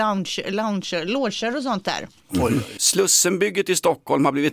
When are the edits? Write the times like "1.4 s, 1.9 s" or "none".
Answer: 2.8 s